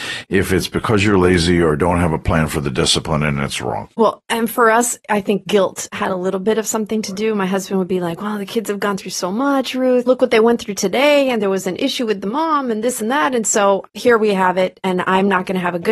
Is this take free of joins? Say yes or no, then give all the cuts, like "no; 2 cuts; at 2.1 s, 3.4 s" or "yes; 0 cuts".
no; 1 cut; at 10.1 s